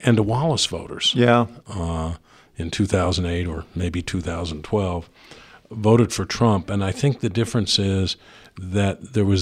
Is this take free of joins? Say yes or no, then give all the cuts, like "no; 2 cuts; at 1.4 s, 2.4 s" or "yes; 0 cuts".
no; 1 cut; at 1.6 s